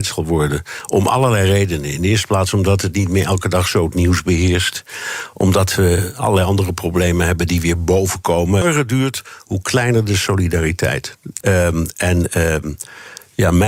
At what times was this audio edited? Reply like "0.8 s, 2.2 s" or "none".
8.6 s, 11.4 s